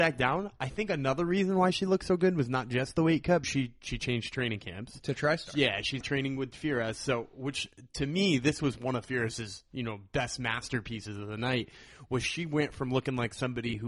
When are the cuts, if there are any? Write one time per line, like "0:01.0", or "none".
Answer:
0:03.4
0:06.0